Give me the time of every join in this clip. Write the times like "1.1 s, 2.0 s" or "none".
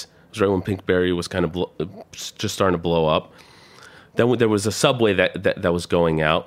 none